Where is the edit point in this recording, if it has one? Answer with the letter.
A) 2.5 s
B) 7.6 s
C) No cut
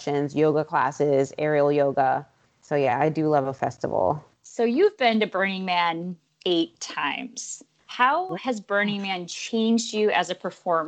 C